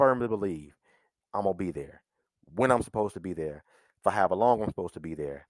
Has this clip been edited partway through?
no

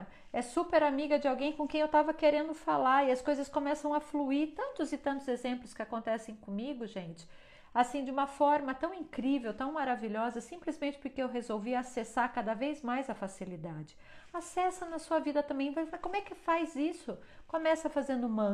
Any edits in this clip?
no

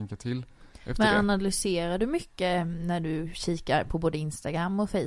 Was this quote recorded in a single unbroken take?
yes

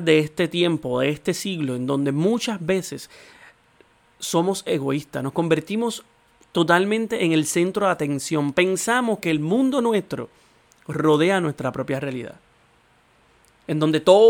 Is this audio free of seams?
yes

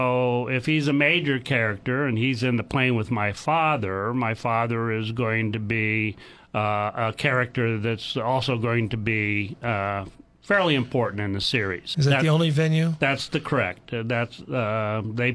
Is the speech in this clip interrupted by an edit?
yes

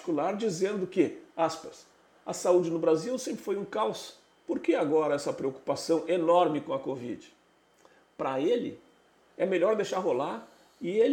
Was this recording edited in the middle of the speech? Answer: no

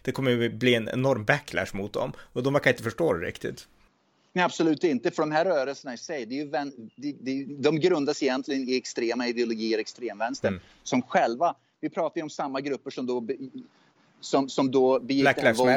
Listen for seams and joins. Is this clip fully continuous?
yes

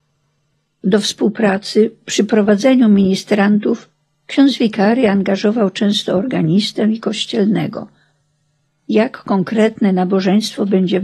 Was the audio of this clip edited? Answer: yes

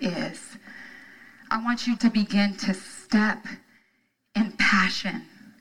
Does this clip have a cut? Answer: yes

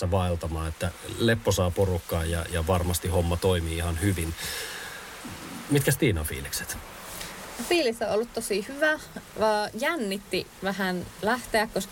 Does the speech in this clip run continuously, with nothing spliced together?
yes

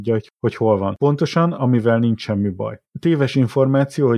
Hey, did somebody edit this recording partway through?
no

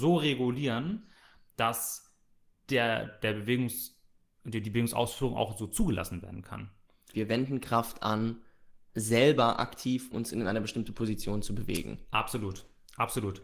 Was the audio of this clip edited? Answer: yes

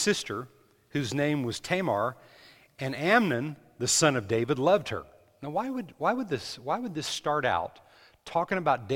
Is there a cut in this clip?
no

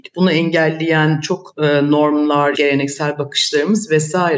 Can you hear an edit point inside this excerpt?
yes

